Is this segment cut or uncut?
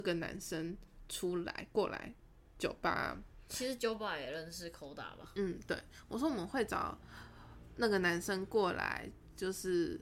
uncut